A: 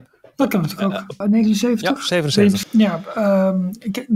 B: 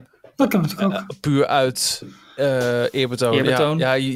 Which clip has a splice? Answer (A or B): A